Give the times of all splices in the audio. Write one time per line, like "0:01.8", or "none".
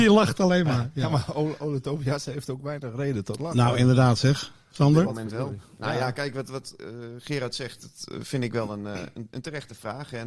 none